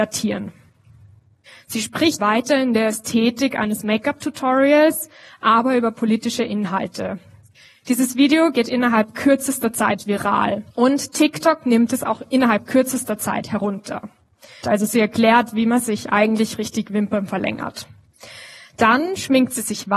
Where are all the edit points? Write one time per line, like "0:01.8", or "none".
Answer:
0:02.2
0:14.6